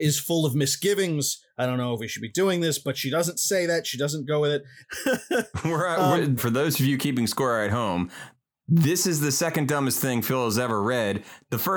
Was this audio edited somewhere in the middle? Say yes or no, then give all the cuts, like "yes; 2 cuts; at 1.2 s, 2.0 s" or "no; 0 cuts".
yes; 2 cuts; at 4.8 s, 6.4 s